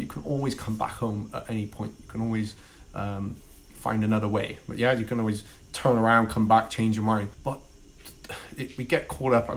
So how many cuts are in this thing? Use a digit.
1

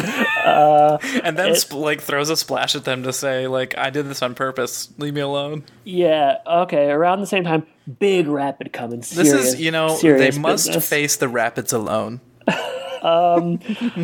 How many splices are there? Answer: 1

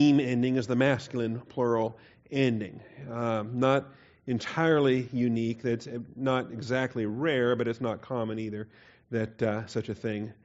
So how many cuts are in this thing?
0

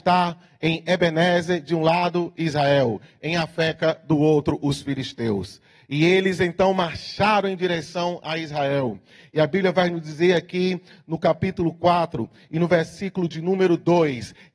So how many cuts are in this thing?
0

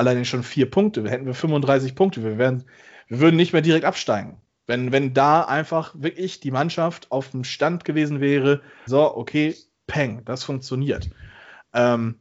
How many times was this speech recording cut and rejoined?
1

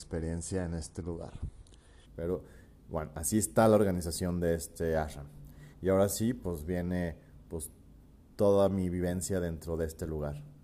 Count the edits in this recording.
2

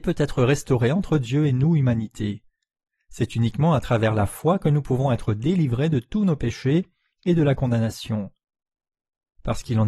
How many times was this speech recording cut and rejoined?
0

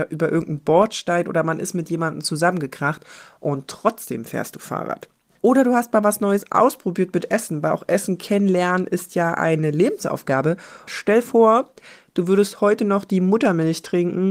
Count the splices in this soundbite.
1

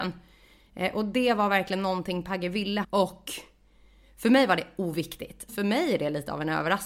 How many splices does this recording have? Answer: 2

